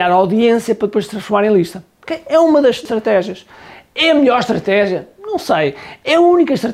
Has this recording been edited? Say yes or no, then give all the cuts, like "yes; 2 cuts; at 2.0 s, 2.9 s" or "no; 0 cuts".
no; 0 cuts